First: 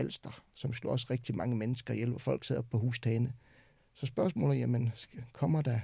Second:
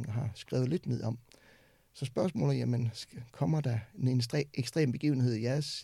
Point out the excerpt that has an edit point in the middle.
first; 1 cut; at 3.8 s

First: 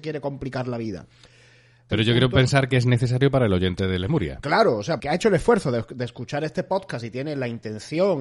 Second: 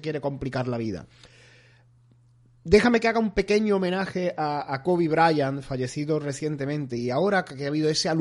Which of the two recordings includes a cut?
first; 2 cuts; at 1.9 s, 5.0 s

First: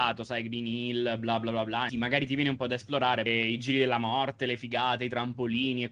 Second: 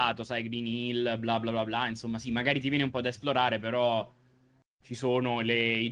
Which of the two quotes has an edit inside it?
first; 2 cuts; at 1.9 s, 3.3 s

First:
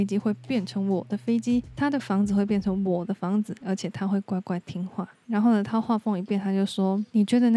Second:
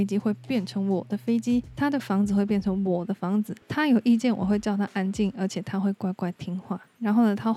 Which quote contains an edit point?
first; 1 cut; at 3.6 s

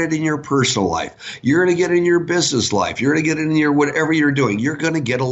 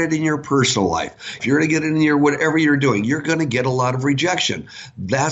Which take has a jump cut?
second; 1 cut; at 1.4 s

